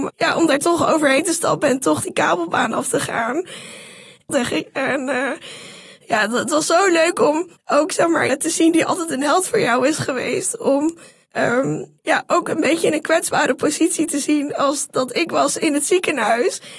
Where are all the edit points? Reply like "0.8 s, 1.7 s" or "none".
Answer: 4.3 s, 8.3 s